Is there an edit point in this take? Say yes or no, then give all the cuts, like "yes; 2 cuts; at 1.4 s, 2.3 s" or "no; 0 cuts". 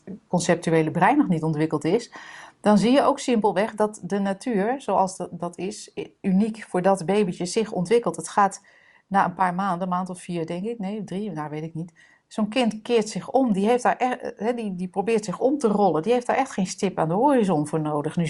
no; 0 cuts